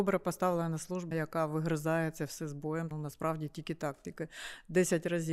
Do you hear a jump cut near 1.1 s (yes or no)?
yes